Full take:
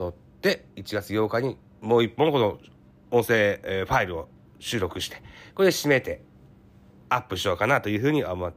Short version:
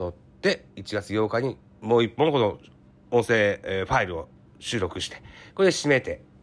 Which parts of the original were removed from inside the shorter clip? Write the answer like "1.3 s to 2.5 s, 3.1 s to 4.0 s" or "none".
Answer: none